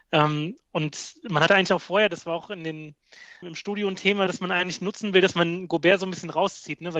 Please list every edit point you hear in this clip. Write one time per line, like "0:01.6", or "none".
0:03.4